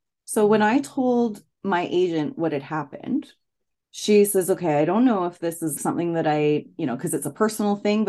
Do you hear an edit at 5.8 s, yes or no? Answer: yes